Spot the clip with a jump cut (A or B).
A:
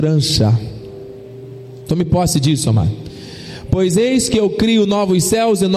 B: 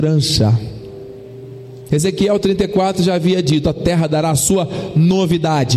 B